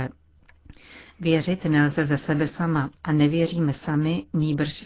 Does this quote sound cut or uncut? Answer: cut